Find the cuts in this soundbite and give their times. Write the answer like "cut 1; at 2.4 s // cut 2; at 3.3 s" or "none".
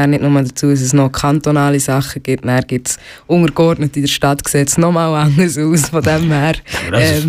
none